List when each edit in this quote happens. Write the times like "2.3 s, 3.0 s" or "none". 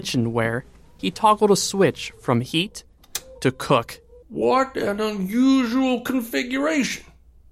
1.0 s, 4.2 s